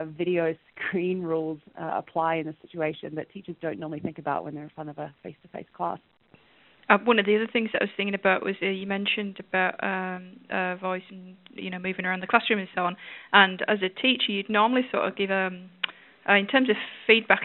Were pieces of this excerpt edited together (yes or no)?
no